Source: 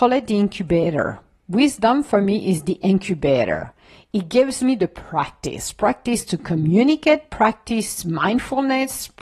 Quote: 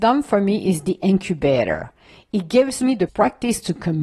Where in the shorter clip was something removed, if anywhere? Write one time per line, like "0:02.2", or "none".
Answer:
0:03.1